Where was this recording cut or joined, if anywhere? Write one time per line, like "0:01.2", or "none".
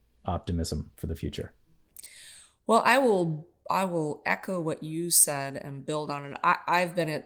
none